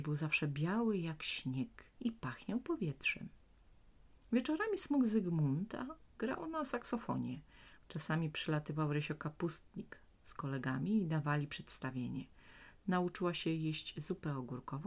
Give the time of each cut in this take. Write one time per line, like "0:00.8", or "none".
0:01.9
0:07.8
0:12.8